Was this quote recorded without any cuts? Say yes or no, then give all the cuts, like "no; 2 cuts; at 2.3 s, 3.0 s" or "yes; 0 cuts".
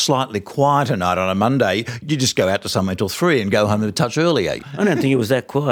yes; 0 cuts